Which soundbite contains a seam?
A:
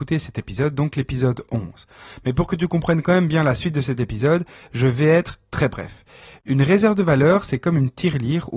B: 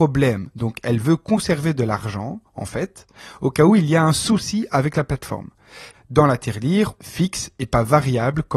B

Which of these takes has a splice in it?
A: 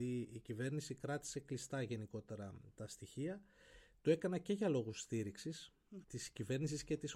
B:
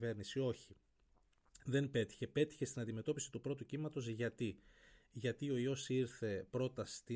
A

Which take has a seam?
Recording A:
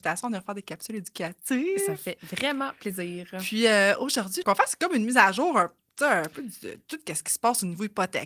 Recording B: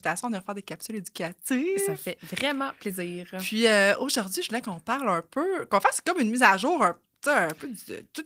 A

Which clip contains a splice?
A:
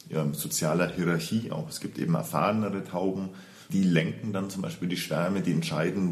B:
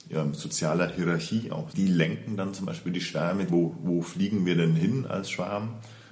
B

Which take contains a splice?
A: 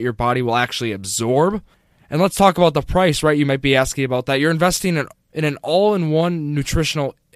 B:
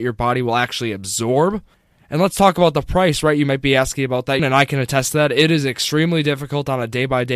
B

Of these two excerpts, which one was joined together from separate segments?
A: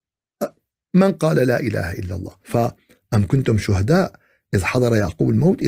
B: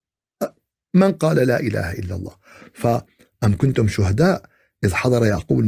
A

